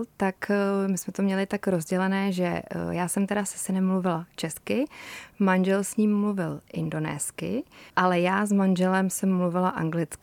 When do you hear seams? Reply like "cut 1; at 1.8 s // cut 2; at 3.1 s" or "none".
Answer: cut 1; at 7.9 s